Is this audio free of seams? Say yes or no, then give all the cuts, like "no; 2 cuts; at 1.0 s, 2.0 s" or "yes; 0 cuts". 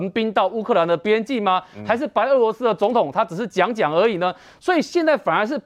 yes; 0 cuts